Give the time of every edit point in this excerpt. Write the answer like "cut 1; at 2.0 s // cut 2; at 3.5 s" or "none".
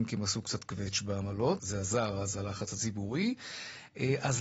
cut 1; at 1.6 s